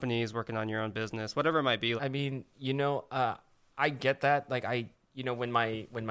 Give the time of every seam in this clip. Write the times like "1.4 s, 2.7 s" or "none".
2.0 s